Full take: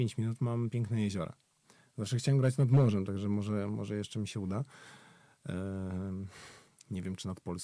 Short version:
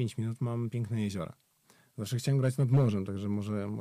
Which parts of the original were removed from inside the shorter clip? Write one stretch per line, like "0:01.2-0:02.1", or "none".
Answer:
none